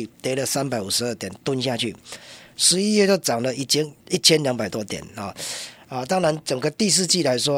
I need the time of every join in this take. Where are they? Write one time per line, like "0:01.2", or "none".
0:04.0